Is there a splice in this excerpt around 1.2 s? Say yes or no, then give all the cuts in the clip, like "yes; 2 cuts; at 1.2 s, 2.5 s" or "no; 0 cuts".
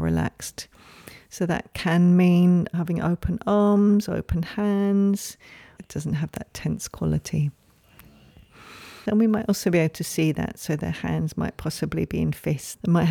no; 2 cuts; at 5.8 s, 9.1 s